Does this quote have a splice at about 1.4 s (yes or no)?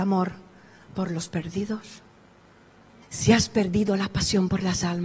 no